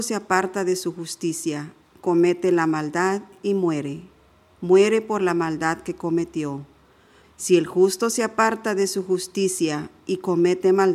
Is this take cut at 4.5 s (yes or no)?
no